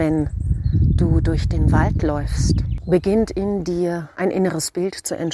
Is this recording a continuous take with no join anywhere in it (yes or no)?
yes